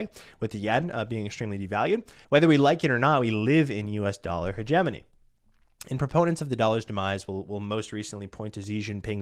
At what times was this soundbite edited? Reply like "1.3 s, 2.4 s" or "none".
2.2 s